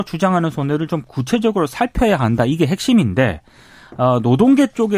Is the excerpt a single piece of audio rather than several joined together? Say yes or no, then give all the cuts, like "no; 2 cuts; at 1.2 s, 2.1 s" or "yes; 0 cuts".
yes; 0 cuts